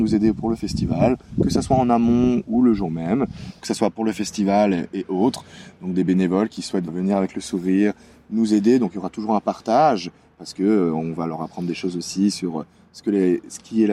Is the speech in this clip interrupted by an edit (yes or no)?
yes